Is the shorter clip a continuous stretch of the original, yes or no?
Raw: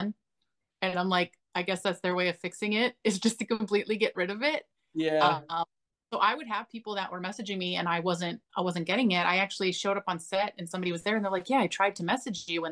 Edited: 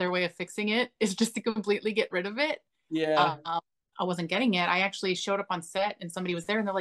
no